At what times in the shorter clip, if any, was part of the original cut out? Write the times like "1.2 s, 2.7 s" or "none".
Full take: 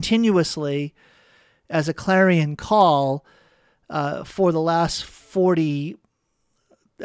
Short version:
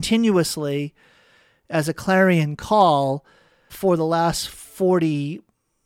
3.7 s